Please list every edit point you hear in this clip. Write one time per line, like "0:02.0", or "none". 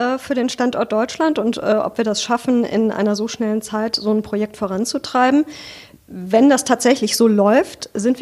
none